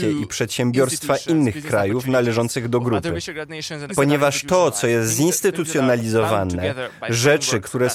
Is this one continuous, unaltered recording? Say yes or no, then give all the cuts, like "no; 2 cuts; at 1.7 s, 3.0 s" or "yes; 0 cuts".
no; 1 cut; at 3.9 s